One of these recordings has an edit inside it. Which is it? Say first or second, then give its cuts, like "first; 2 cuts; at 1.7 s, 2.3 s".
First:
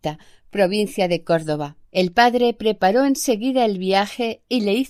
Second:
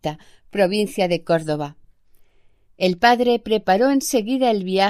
first; 1 cut; at 1.8 s